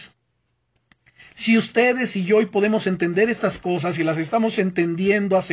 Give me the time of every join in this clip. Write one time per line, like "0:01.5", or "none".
0:01.3